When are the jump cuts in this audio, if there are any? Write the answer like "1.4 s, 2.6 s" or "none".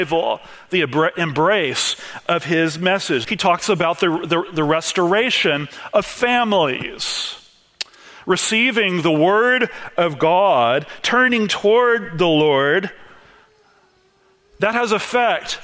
3.2 s